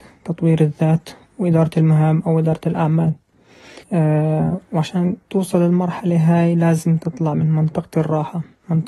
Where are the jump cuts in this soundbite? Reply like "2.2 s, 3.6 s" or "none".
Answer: 3.8 s, 5.2 s